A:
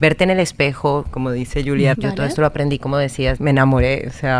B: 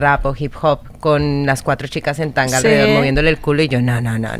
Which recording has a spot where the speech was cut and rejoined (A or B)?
A